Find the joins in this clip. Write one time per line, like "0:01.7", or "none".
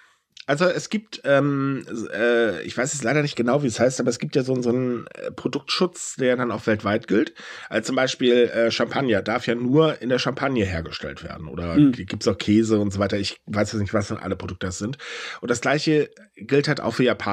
none